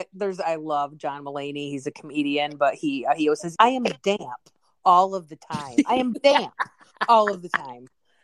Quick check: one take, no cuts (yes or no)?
no